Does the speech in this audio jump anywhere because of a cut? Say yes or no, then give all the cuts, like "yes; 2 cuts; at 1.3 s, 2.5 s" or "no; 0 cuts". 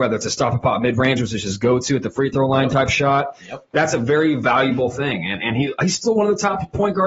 no; 0 cuts